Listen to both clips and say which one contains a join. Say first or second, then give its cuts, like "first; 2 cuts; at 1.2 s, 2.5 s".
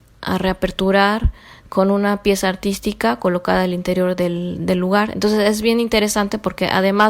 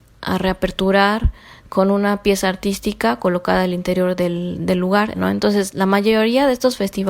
second; 1 cut; at 5.1 s